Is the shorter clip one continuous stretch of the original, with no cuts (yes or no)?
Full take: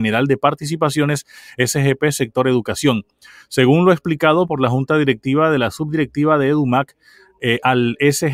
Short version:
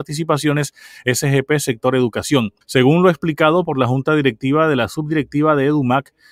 no